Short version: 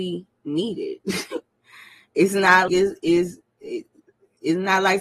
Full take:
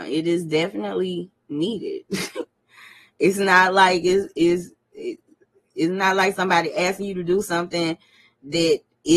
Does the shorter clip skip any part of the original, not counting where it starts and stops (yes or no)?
yes